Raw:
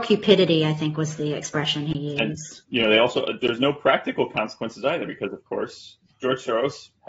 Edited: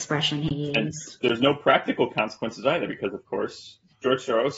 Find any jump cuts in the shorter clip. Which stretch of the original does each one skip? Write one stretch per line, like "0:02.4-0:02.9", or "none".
0:02.6-0:03.4